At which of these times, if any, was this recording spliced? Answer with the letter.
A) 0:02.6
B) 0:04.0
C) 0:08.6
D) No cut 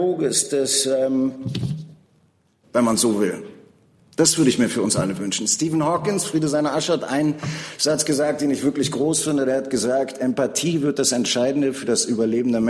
A